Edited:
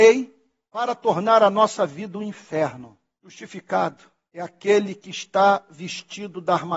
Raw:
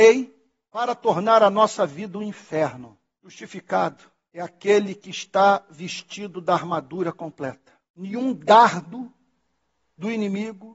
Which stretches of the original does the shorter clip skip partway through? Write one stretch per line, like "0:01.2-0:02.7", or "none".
none

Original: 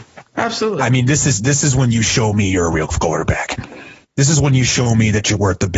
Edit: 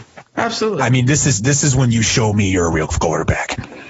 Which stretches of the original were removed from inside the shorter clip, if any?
none

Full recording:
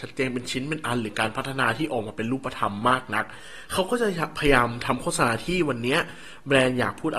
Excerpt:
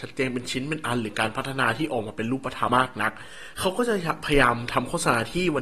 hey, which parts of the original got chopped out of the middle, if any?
0:02.7-0:02.8

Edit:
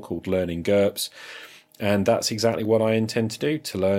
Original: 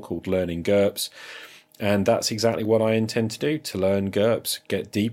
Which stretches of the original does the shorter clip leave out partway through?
none

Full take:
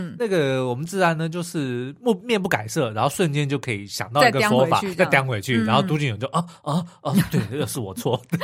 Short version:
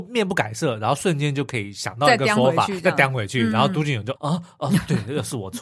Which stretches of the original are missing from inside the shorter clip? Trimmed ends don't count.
0:06.3-0:06.6

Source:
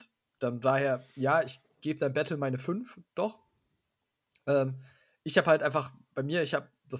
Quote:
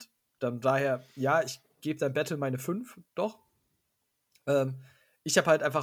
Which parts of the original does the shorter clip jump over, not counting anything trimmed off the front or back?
none

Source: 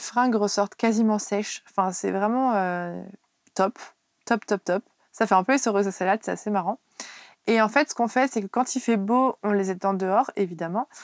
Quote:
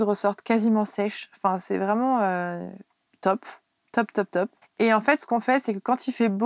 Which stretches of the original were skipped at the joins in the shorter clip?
0:04.9-0:07.3

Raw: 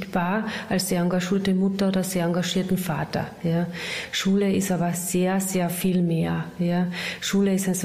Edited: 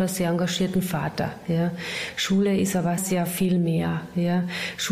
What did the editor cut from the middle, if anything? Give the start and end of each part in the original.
0:04.9-0:05.4

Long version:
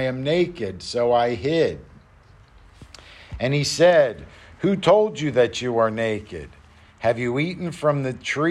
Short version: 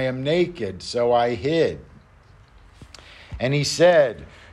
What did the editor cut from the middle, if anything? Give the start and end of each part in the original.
none

